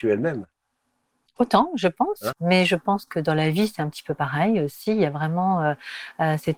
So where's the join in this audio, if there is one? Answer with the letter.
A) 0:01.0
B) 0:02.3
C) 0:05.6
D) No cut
B